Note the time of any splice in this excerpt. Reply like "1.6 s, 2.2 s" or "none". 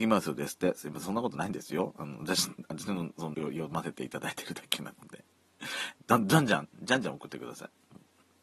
3.3 s, 5.9 s